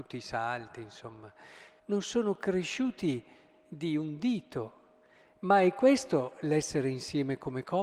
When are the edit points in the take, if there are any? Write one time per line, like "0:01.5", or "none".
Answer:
0:01.8